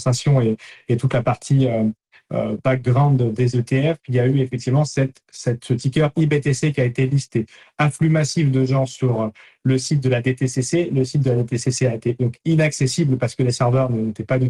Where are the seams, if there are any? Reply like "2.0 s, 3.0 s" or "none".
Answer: none